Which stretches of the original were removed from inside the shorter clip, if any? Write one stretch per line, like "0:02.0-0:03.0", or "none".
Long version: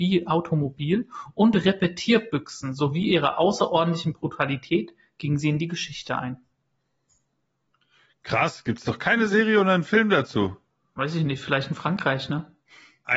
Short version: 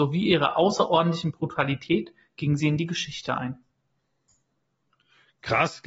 none